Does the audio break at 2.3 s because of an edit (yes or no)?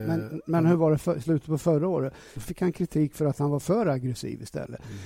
yes